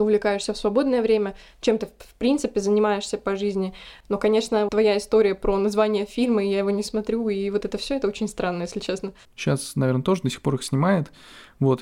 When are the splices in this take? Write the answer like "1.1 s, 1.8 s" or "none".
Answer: 4.7 s, 9.2 s